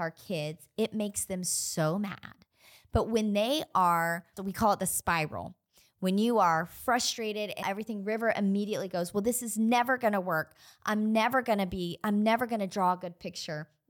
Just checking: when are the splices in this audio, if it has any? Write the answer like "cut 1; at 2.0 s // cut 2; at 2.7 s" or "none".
cut 1; at 4.4 s // cut 2; at 7.6 s